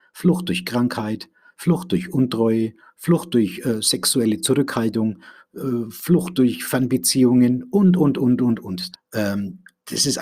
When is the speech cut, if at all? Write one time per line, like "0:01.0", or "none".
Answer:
0:08.9